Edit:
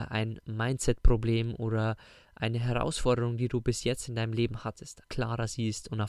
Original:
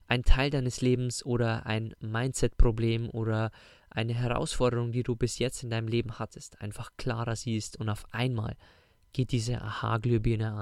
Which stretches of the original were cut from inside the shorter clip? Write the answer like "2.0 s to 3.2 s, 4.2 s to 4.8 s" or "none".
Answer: 6.6 s to 6.9 s

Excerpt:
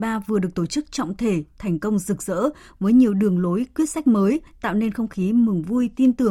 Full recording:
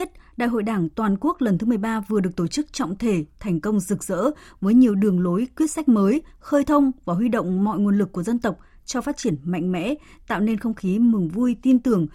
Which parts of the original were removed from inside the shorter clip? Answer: 6.3 s to 10.1 s

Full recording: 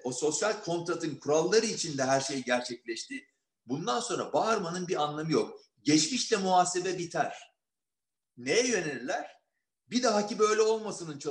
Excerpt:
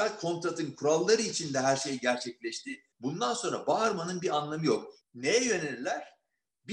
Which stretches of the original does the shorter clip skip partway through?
3.4 s to 3.6 s, 5.7 s to 8.2 s

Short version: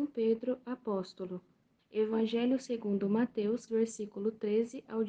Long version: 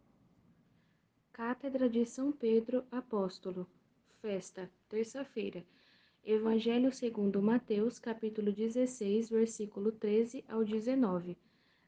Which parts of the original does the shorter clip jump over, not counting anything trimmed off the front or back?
4.0 s to 6.1 s, 8.0 s to 9.3 s

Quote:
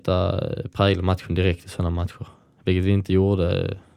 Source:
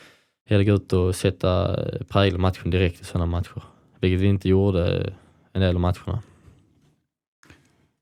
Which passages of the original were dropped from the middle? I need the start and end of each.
none

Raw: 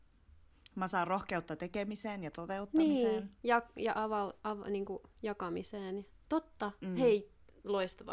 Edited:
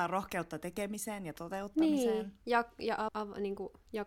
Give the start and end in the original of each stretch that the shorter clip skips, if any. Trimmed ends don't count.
4.1 s to 4.4 s

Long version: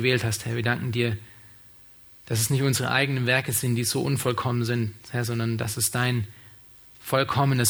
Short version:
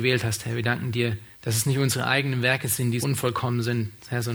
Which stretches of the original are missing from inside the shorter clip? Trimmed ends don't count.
1.3 s to 2.2 s, 3.8 s to 4.0 s

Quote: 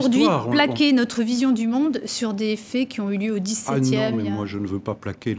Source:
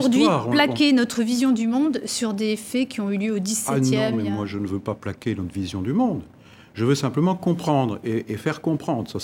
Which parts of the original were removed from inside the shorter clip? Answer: none

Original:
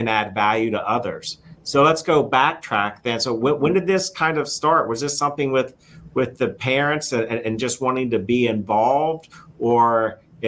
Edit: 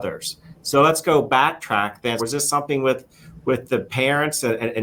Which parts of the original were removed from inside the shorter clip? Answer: 3.2 s to 4.9 s

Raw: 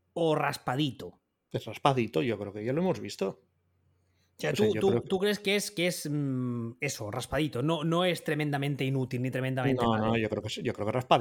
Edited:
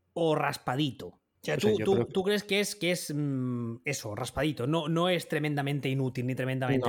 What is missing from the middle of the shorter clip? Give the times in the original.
1.4 s to 4.3 s

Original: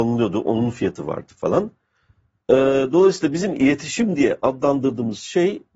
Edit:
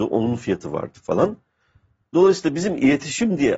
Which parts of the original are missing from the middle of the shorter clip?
2.5 s to 2.9 s

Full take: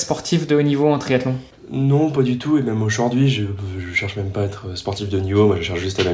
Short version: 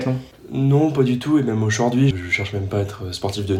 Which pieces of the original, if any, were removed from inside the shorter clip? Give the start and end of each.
3.3 s to 3.7 s

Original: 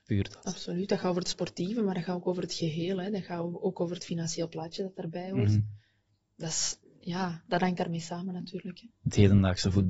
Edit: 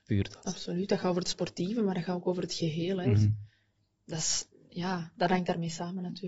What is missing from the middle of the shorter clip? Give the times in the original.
3.0 s to 5.3 s

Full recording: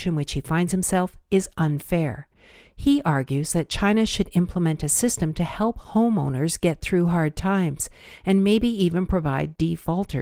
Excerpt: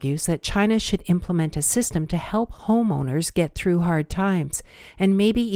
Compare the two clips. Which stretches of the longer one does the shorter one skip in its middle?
none

